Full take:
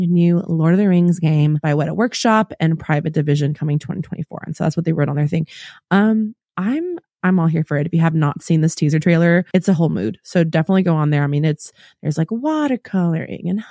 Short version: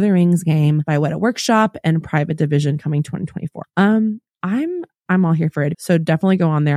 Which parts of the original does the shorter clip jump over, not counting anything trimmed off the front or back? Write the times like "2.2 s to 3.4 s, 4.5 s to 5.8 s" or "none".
4.4 s to 5.8 s, 7.9 s to 10.2 s